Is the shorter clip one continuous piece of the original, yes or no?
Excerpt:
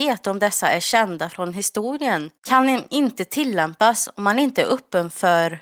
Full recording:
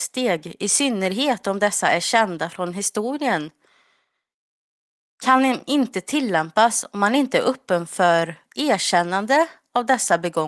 no